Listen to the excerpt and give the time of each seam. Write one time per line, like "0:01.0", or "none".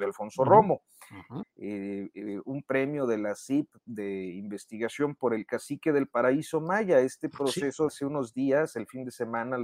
0:01.4
0:07.9